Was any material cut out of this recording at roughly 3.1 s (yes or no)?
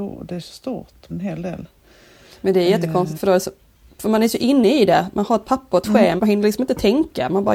yes